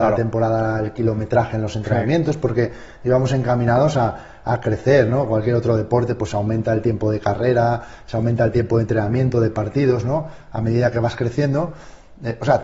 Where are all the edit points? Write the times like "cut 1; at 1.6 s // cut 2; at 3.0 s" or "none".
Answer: none